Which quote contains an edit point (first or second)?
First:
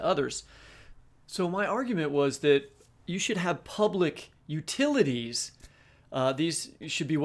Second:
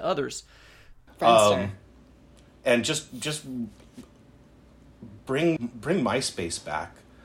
second